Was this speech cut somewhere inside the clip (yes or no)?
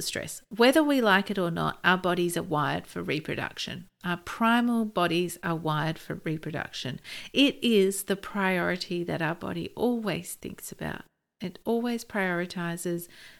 no